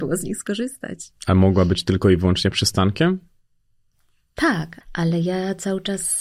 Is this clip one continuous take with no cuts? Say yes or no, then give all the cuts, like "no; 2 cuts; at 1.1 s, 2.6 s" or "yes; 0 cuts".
no; 1 cut; at 4.8 s